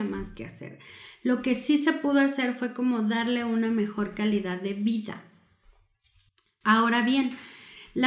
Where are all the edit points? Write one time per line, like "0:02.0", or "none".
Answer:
none

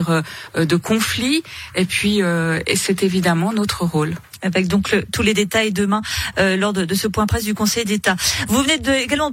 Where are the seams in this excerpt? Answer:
none

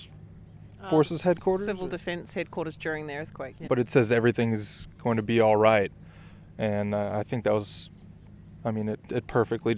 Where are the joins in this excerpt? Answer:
0:03.7

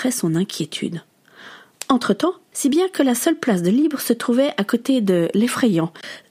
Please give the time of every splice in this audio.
0:02.5

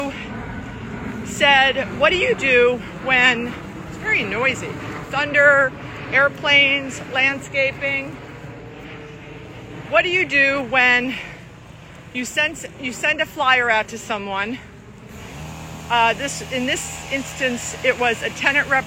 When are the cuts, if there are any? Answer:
none

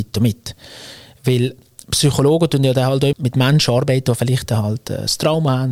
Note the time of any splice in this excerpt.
0:03.1

